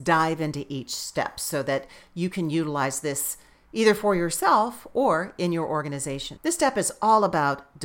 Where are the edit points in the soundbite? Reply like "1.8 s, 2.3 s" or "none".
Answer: 6.4 s